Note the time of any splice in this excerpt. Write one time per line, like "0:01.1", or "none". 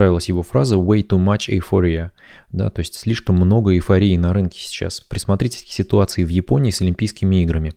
none